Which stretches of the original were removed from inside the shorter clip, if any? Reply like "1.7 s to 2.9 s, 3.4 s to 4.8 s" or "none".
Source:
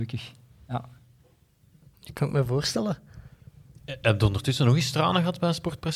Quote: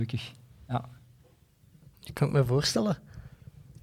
none